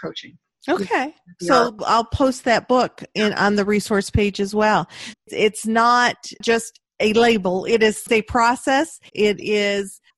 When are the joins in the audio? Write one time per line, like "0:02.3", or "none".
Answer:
0:05.1
0:09.1